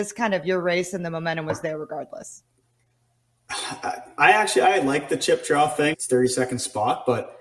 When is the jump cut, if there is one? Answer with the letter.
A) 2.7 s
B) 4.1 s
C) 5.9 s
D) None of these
C